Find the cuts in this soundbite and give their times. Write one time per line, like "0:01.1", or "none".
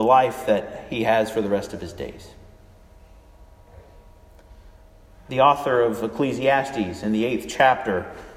none